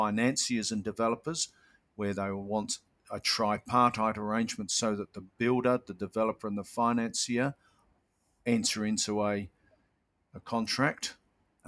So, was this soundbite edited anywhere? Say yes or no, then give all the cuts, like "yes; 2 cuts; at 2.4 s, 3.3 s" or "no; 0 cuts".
no; 0 cuts